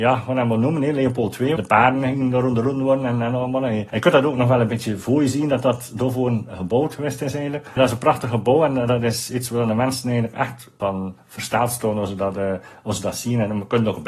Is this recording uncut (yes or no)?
yes